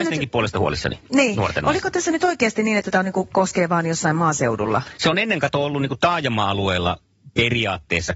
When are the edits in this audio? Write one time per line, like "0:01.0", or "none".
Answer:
0:01.0